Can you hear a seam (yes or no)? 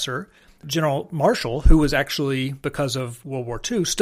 no